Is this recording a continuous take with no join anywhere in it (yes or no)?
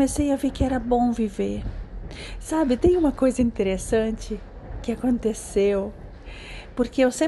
yes